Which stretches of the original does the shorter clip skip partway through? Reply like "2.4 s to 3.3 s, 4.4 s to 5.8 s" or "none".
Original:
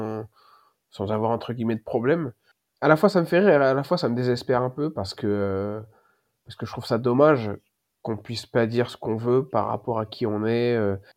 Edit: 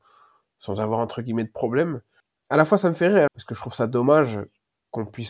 3.6 s to 6.4 s